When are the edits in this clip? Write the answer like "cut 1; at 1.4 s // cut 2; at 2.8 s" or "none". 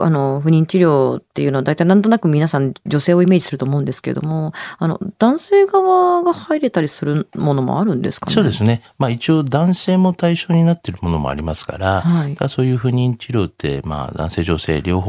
none